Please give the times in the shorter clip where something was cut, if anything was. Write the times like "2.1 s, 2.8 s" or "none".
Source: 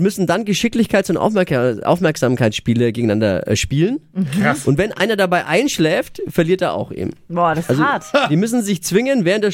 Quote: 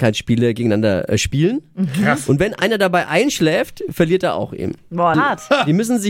5.1 s